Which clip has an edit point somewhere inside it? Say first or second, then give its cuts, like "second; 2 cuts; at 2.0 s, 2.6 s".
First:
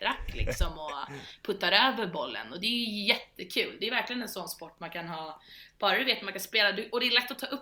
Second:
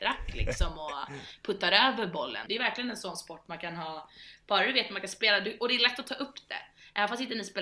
second; 1 cut; at 2.5 s